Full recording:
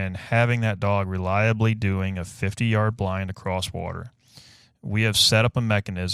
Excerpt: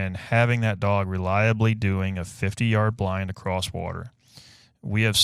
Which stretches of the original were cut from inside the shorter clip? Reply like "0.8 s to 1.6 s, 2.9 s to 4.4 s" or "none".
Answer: none